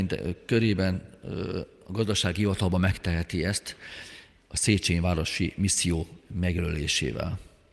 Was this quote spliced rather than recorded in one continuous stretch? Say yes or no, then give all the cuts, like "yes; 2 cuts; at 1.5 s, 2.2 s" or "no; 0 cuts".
no; 0 cuts